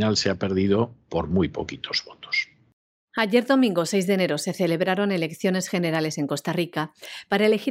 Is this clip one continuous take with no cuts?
yes; 0 cuts

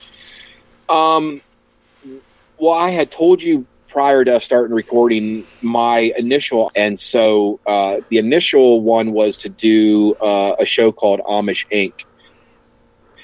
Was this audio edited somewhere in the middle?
yes; 1 cut; at 6.7 s

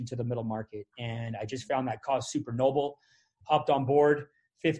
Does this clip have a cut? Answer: no; 0 cuts

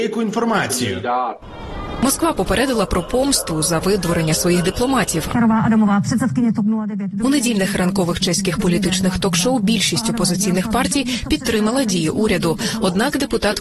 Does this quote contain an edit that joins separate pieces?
yes; 1 cut; at 5.3 s

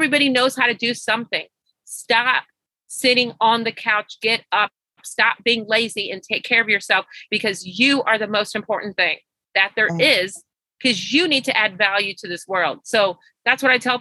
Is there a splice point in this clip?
no; 0 cuts

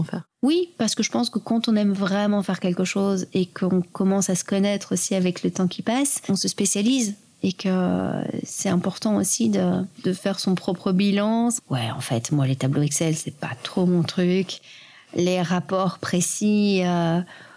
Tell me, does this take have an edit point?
yes; 1 cut; at 11.6 s

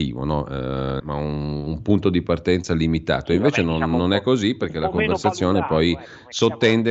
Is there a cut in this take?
yes; 1 cut; at 1.0 s

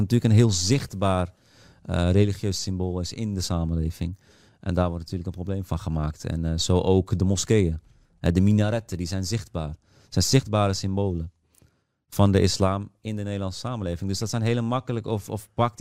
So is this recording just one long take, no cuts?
yes; 0 cuts

